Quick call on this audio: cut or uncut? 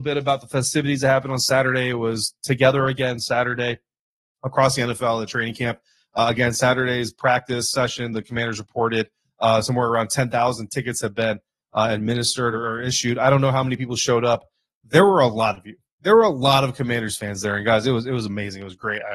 uncut